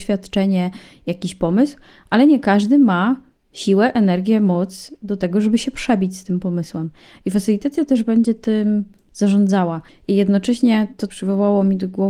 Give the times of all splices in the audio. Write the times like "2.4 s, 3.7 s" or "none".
9.9 s, 11.1 s